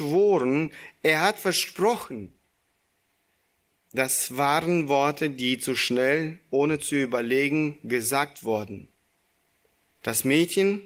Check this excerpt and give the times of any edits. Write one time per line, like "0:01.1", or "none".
0:10.0

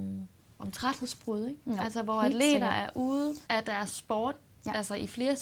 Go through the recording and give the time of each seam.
0:03.5

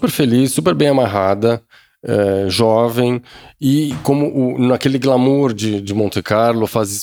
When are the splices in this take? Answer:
none

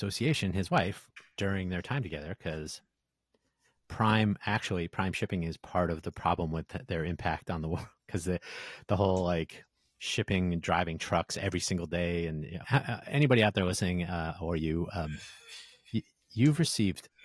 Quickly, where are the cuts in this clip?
0:12.6

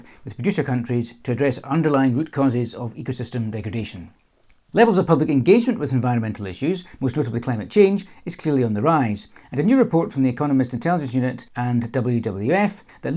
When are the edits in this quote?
none

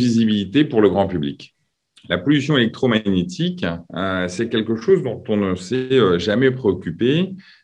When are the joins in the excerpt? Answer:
0:03.9

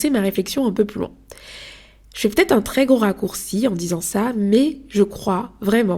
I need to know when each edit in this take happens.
none

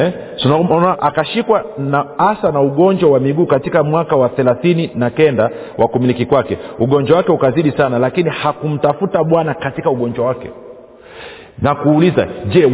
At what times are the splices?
0:00.9

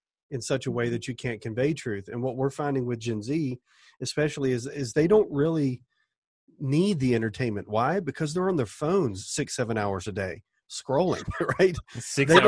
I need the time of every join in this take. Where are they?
none

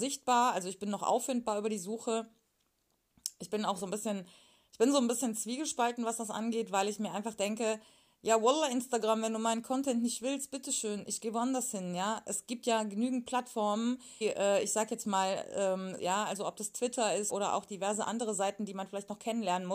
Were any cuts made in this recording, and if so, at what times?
0:14.2
0:16.0
0:17.3

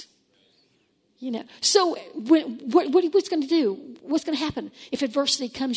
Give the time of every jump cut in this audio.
none

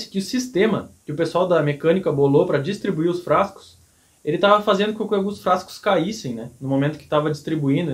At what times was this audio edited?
none

